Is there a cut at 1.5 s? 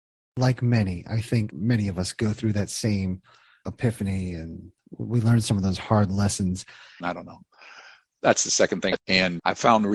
no; 2 cuts; at 7.0 s, 9.0 s

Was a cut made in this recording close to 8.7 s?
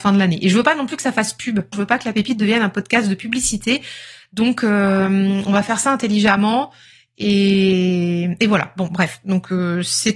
no; 1 cut; at 1.7 s

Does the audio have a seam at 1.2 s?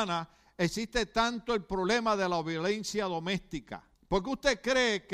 no; 1 cut; at 3.9 s

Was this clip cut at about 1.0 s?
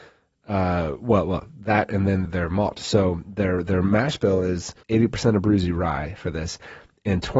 no; 2 cuts; at 2.2 s, 4.8 s

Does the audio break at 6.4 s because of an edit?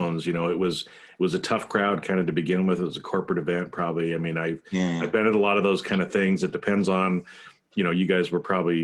no; 0 cuts

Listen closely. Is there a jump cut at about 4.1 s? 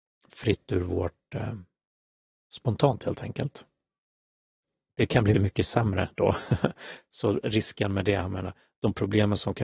no; 1 cut; at 5.3 s

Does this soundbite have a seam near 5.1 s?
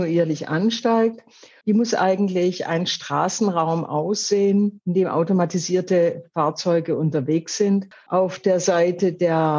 no; 2 cuts; at 1.6 s, 7.9 s

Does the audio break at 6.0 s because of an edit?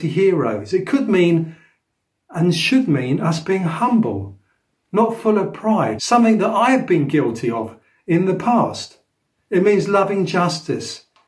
yes; 1 cut; at 6.0 s

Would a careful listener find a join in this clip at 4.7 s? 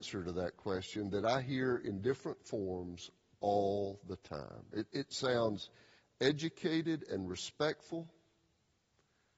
no; 0 cuts

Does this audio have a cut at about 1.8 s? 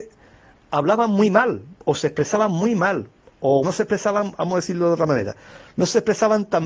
yes; 2 cuts; at 1.8 s, 3.6 s

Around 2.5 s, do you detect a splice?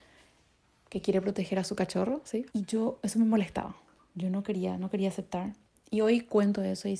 yes; 1 cut; at 2.5 s

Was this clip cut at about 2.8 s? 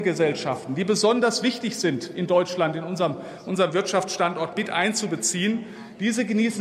no; 0 cuts

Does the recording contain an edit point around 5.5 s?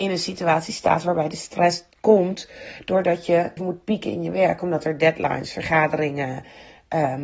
no; 1 cut; at 3.6 s

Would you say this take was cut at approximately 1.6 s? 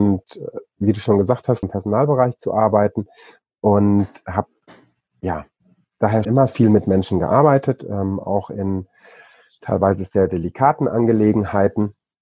yes; 2 cuts; at 1.6 s, 6.2 s

